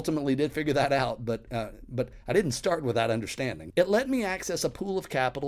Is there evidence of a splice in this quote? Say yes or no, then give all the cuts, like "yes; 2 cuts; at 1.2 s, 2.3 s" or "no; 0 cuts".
yes; 1 cut; at 3.7 s